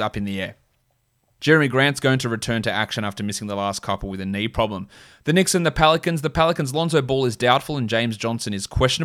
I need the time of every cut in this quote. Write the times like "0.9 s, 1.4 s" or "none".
1.4 s